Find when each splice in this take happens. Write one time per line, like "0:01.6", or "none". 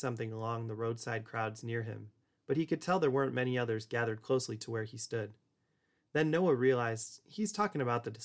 none

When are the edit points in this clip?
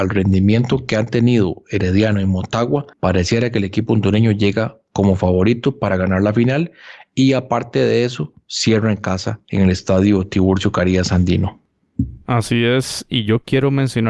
0:02.9

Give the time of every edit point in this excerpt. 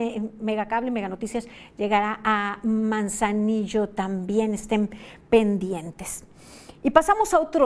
none

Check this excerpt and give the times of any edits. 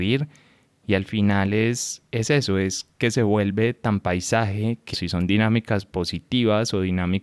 0:04.9

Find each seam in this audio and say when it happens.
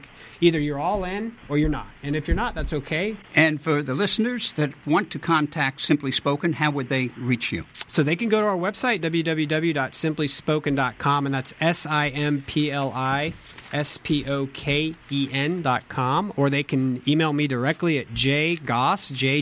0:03.2

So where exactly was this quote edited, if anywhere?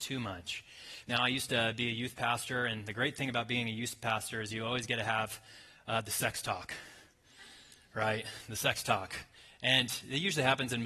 0:01.0

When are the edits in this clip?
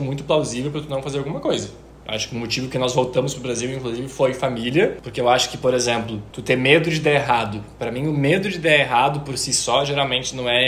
0:05.0

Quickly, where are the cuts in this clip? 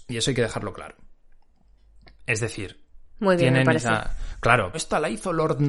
0:04.7

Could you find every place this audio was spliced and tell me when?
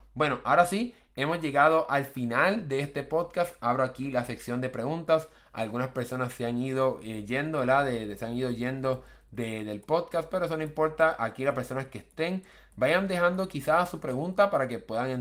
none

